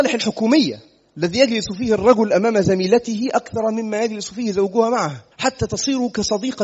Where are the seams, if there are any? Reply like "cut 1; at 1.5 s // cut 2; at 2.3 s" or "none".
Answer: cut 1; at 5.3 s